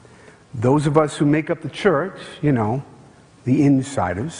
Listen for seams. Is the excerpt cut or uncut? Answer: uncut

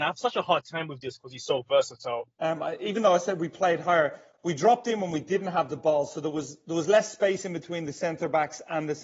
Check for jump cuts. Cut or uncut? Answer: cut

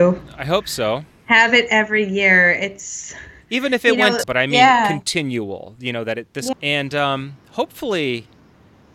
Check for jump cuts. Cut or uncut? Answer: cut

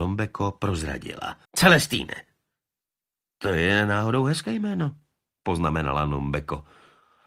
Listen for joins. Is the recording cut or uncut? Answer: cut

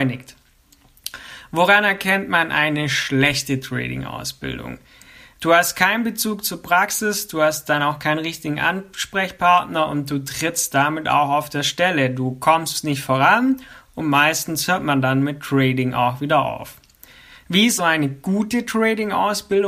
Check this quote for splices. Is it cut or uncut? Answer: cut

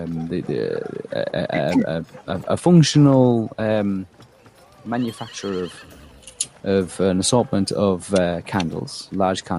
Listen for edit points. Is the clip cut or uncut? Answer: uncut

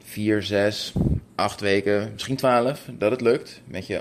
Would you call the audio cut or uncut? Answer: uncut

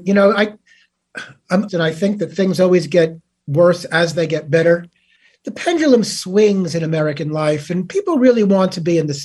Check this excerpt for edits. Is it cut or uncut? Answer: cut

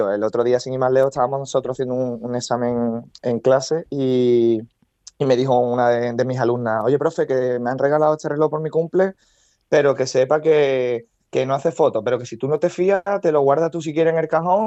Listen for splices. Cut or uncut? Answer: uncut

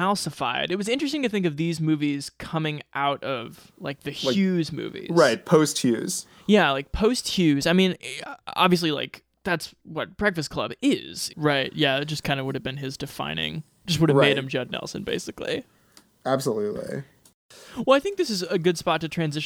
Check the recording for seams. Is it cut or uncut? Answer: cut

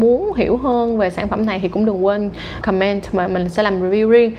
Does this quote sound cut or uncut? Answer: cut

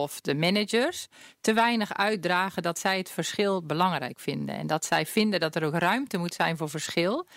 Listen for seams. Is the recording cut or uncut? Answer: uncut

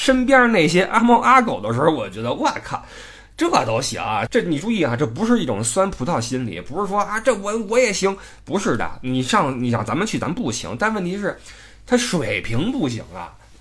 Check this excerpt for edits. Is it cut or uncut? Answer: cut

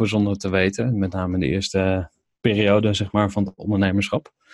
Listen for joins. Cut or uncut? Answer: uncut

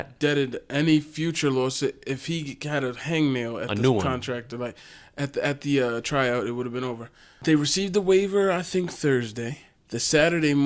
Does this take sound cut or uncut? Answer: uncut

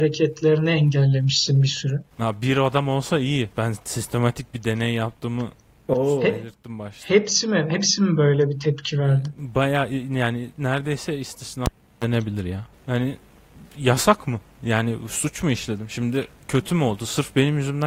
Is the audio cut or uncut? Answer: cut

